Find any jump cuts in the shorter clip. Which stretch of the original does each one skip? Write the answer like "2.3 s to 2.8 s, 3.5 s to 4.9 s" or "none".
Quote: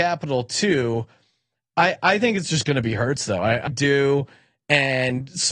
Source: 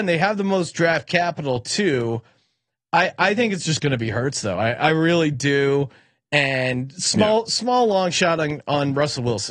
4.8 s to 5.3 s